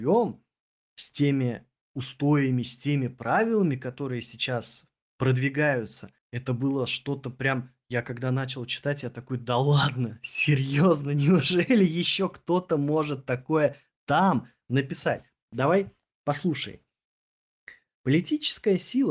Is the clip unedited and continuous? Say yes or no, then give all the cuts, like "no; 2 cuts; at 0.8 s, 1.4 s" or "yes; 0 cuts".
no; 2 cuts; at 6.2 s, 17.9 s